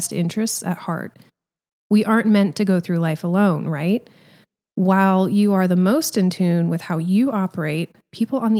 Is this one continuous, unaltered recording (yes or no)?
yes